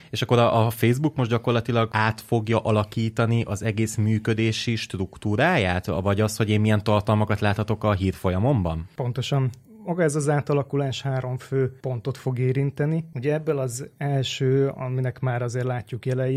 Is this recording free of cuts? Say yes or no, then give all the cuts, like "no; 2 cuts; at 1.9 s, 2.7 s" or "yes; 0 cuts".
yes; 0 cuts